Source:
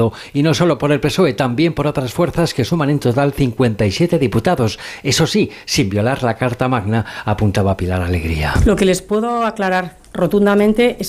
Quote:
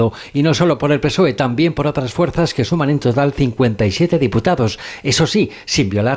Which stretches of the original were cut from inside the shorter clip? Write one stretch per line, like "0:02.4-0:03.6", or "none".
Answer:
none